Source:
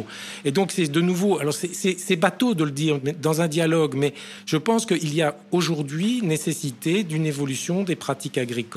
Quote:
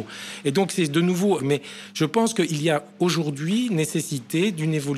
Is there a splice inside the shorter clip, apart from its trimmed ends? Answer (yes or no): yes